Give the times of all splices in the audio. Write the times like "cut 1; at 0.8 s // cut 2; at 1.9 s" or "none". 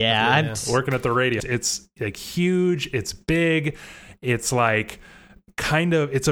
cut 1; at 1.4 s